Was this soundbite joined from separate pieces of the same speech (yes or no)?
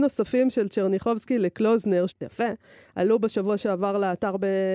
yes